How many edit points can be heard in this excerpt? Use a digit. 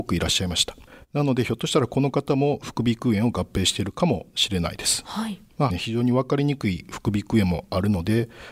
1